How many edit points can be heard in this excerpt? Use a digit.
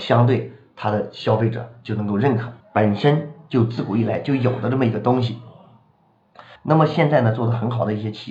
2